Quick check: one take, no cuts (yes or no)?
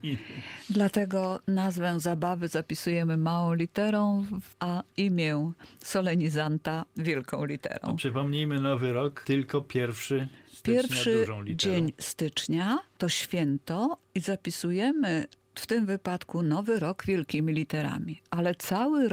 yes